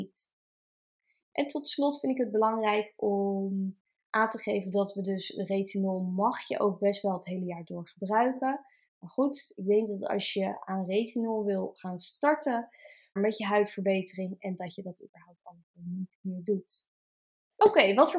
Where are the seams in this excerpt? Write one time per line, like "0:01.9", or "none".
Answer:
0:08.9
0:13.2